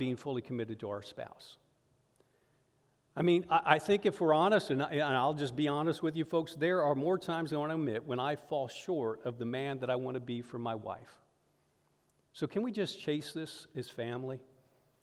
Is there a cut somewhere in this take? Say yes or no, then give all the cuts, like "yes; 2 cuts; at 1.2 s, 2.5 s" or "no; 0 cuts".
yes; 1 cut; at 12.2 s